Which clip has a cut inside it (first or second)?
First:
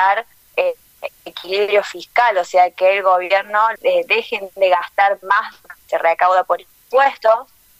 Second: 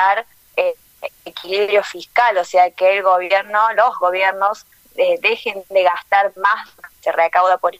first